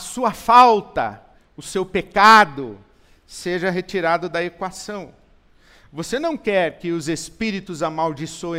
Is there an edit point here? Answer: yes; 1 cut; at 1.4 s

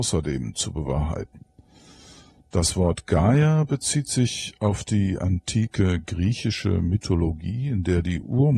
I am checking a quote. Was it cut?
no; 0 cuts

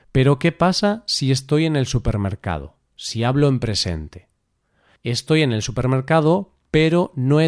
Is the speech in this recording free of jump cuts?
yes; 0 cuts

